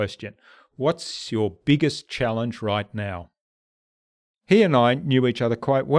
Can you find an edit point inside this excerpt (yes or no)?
yes